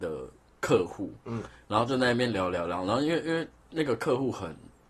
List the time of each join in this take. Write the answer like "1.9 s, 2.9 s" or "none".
none